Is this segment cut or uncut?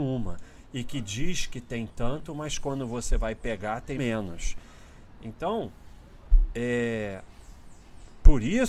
cut